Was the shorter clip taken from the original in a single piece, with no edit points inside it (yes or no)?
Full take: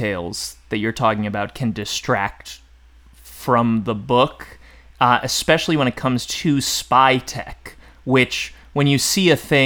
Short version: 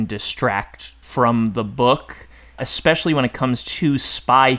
no